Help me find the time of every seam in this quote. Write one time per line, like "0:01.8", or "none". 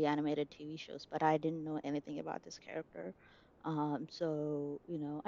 none